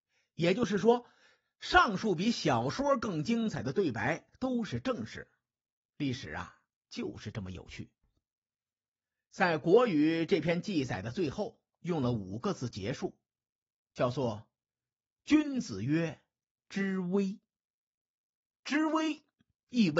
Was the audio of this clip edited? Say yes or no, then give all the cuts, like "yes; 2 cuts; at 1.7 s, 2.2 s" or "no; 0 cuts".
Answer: no; 0 cuts